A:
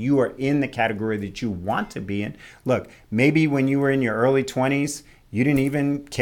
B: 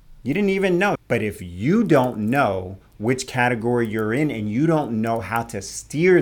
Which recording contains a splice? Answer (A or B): B